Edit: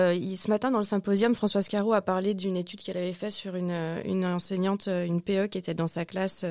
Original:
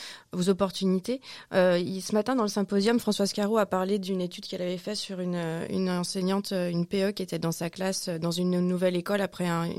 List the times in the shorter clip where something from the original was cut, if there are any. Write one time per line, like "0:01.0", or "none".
none